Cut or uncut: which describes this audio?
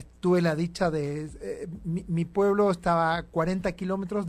uncut